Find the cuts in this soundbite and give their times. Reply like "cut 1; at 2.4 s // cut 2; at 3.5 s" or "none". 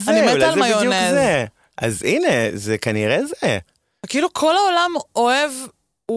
none